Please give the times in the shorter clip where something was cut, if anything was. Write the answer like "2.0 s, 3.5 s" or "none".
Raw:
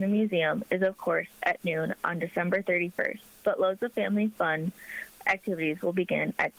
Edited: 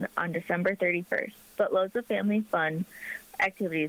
none